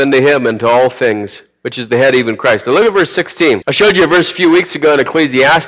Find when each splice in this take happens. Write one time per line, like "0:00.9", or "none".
0:03.6